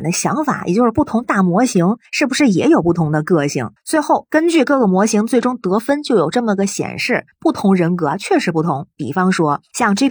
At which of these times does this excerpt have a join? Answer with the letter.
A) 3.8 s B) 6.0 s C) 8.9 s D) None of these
A